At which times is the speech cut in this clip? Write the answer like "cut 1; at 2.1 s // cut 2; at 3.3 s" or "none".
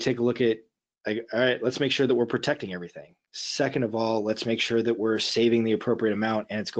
none